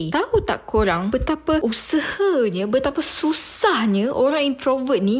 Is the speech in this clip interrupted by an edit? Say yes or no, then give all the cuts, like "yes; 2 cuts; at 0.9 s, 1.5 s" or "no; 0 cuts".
no; 0 cuts